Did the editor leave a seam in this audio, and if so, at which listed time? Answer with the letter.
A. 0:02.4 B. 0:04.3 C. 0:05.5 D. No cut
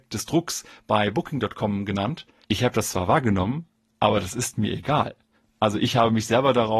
A